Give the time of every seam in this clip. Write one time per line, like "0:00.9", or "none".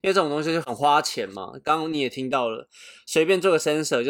none